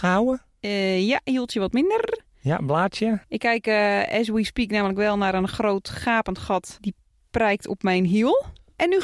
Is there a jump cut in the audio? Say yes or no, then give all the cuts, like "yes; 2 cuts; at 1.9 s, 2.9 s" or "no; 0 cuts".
no; 0 cuts